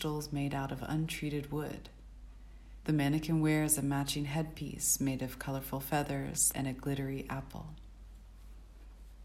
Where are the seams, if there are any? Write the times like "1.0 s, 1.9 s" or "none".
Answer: 2.8 s, 6.5 s